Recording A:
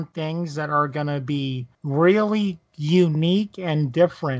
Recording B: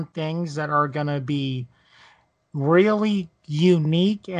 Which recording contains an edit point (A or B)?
A